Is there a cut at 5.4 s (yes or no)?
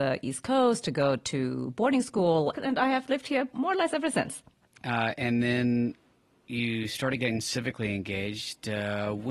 no